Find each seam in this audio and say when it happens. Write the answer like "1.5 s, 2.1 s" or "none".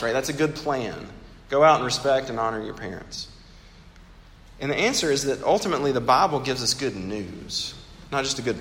4.5 s